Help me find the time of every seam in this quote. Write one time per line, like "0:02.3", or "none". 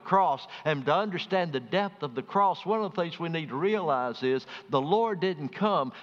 none